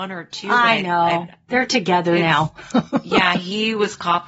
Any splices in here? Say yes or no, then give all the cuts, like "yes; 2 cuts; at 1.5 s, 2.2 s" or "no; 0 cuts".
no; 0 cuts